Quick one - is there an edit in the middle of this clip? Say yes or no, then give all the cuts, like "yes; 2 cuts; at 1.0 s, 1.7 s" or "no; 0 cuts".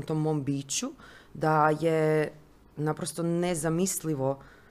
no; 0 cuts